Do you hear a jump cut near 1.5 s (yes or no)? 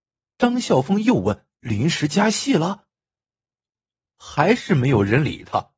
yes